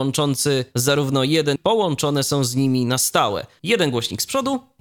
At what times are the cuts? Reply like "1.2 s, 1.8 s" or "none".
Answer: 1.6 s, 3.6 s